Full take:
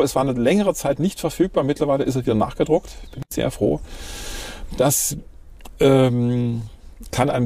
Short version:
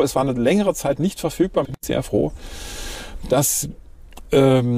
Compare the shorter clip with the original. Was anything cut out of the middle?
yes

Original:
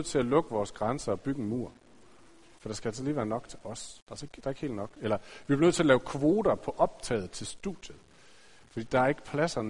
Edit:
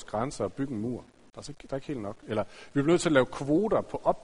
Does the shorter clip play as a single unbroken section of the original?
no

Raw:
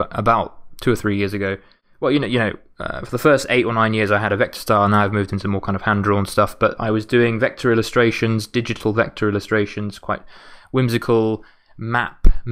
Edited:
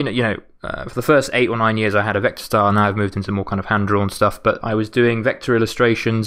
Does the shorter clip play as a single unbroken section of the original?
yes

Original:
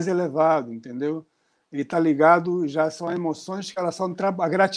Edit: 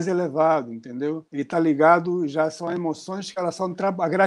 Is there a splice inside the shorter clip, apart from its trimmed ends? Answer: yes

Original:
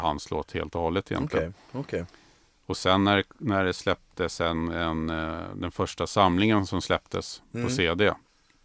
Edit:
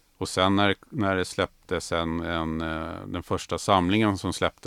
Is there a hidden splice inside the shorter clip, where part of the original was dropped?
no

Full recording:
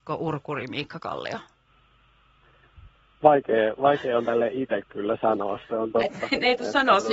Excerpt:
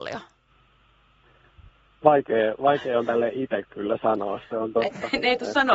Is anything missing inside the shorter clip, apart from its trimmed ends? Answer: no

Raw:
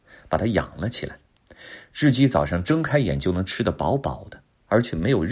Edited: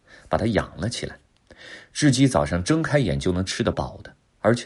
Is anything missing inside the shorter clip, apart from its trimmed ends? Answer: yes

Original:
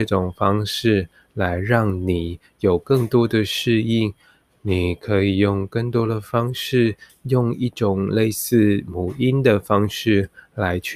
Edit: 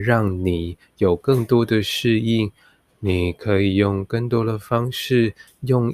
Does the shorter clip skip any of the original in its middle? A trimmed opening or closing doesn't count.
no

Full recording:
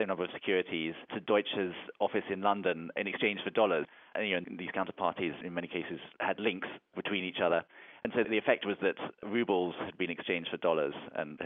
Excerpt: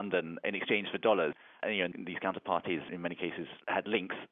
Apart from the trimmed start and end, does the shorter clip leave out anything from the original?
no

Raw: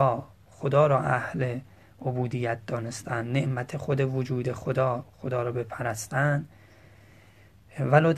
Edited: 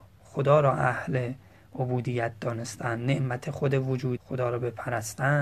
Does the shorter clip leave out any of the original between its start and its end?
yes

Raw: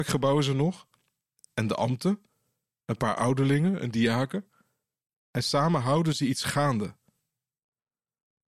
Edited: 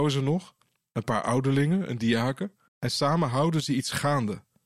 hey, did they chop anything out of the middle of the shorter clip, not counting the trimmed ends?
yes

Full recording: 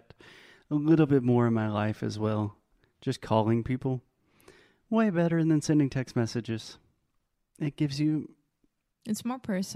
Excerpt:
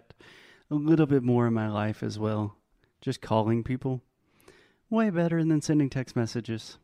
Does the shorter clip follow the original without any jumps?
yes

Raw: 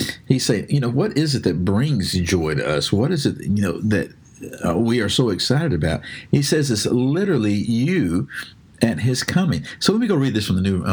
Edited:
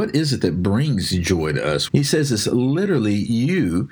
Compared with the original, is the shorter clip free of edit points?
no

